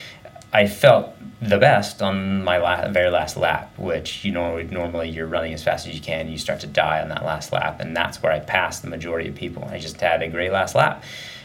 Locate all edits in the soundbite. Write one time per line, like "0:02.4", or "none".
none